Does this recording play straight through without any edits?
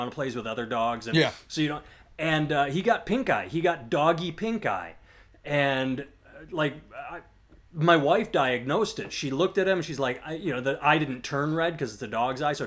yes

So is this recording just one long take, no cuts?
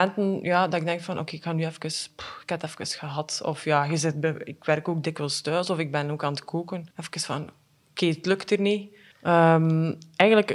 no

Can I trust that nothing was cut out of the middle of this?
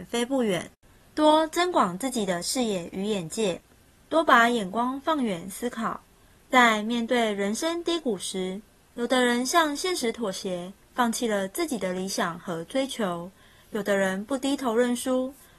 yes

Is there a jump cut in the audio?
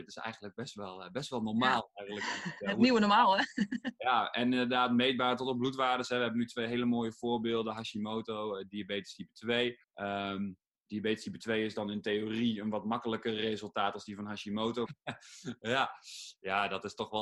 yes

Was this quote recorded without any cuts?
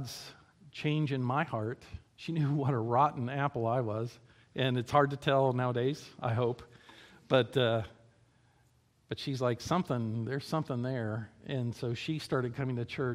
no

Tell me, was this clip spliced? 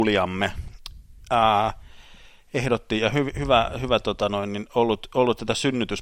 no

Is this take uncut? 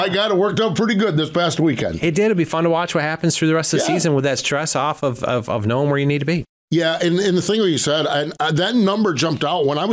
yes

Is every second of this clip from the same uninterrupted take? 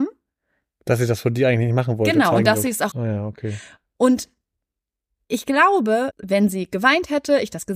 no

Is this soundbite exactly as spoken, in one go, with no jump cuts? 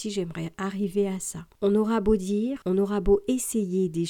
no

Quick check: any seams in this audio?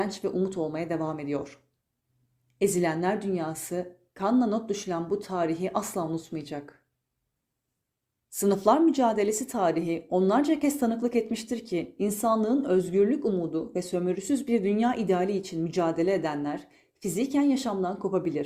no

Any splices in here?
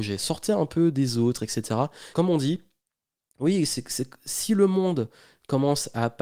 yes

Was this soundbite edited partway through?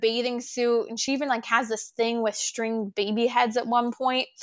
no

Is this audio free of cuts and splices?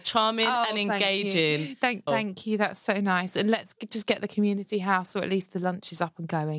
no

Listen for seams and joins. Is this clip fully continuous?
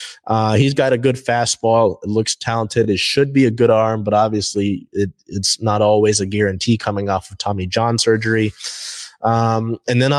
yes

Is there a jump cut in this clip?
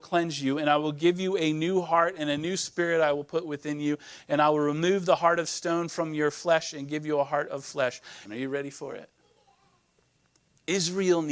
yes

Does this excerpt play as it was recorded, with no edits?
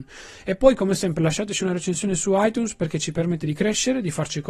yes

